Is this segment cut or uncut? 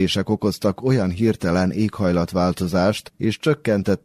cut